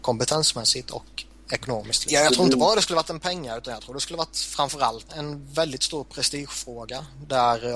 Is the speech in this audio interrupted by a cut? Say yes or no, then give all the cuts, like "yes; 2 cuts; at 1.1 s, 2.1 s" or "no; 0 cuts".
yes; 2 cuts; at 2.1 s, 5.1 s